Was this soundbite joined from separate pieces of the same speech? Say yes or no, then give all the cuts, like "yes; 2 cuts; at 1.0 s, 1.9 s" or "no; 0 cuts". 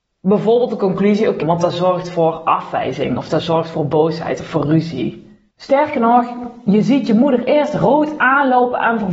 yes; 2 cuts; at 1.4 s, 5.5 s